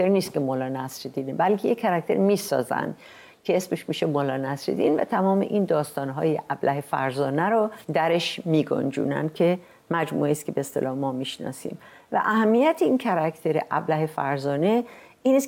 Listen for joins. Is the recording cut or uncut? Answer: cut